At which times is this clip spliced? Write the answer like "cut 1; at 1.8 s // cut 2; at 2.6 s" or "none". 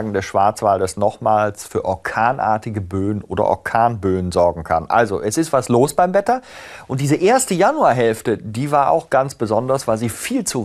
none